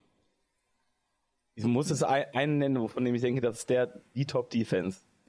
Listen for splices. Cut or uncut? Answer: uncut